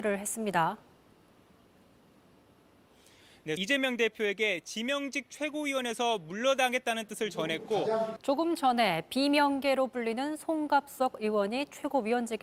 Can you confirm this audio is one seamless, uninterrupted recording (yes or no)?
no